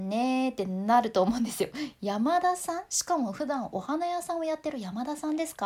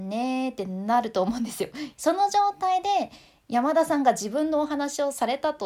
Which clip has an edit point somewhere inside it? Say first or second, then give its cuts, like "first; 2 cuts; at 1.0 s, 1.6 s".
second; 1 cut; at 1.9 s